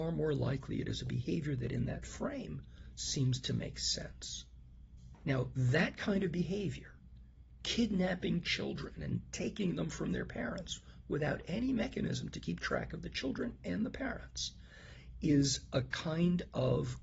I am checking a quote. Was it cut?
yes; 1 cut; at 5.2 s

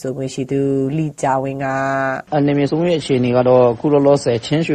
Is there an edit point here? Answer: yes; 1 cut; at 2.3 s

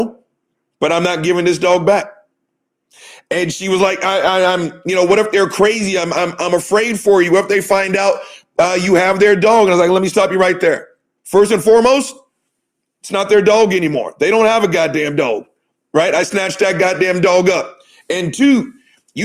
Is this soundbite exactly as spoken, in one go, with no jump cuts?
no; 1 cut; at 11.2 s

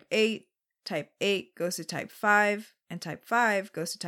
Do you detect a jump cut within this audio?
no; 0 cuts

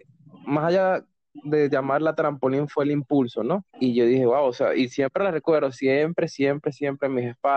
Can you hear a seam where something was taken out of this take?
yes; 1 cut; at 3.6 s

